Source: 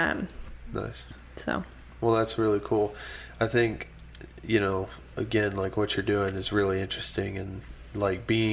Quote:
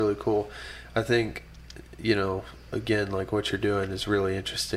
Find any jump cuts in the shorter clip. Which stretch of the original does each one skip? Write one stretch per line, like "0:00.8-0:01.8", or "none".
none

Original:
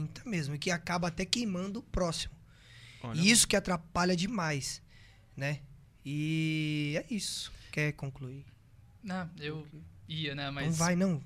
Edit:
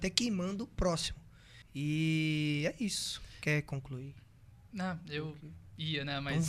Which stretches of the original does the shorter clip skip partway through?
0:02.8-0:05.9

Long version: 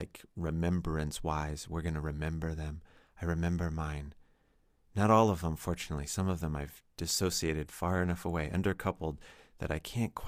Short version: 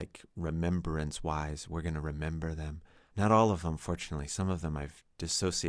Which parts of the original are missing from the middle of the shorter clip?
0:03.1-0:04.9

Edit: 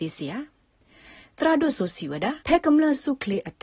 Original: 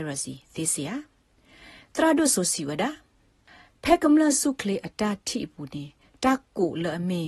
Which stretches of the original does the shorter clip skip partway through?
0:03.0-0:03.8

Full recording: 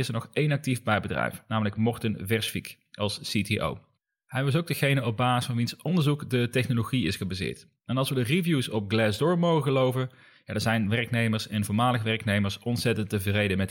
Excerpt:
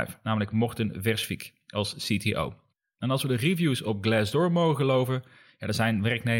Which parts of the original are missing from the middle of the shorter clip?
0:04.2-0:07.8

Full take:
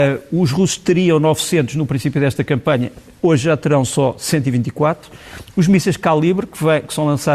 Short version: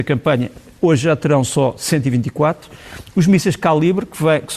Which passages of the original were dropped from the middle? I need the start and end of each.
none

